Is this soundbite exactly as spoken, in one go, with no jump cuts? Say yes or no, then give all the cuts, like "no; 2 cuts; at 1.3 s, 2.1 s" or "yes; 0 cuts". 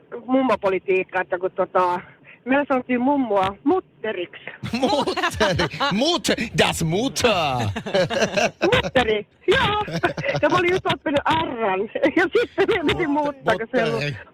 yes; 0 cuts